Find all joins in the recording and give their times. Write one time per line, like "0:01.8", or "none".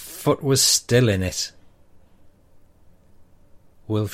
none